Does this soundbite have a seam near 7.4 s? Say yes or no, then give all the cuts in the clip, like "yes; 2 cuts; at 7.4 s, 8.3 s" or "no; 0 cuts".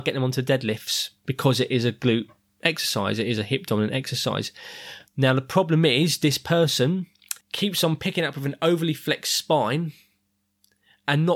yes; 2 cuts; at 5.1 s, 7.4 s